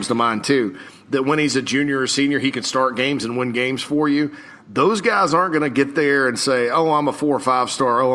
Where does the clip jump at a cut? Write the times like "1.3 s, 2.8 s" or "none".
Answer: none